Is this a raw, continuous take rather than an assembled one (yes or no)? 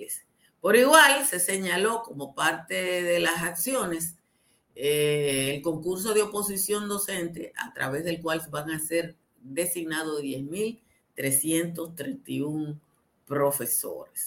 yes